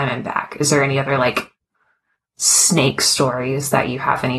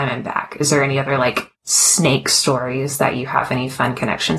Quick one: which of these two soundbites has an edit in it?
second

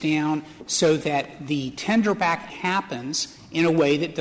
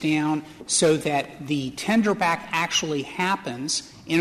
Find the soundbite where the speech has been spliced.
first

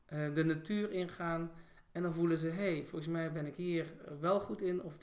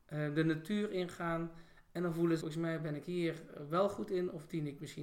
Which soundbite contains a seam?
second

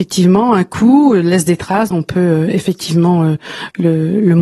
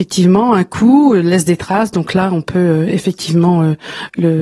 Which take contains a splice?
first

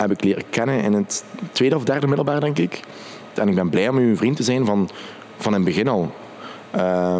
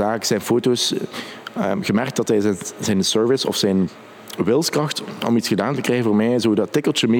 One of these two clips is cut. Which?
first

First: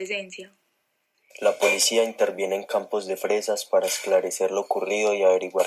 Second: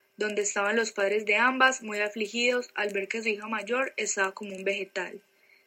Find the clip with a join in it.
first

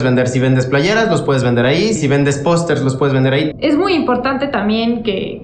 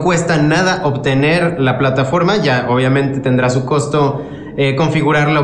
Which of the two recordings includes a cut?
first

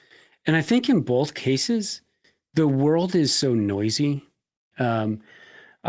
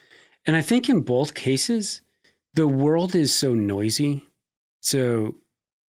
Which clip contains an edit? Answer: first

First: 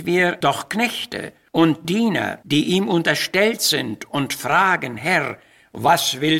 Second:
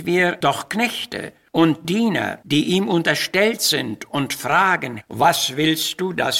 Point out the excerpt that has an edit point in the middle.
second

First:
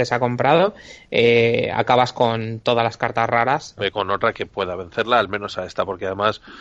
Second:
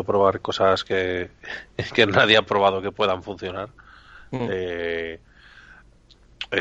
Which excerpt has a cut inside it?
first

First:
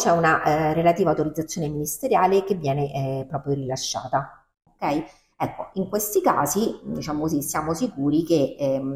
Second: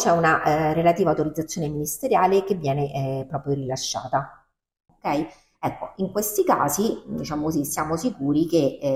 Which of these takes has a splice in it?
first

